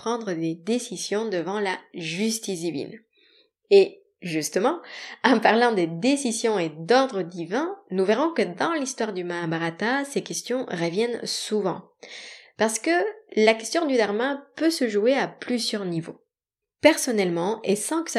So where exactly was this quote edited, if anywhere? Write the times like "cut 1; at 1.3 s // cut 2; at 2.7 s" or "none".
cut 1; at 16.6 s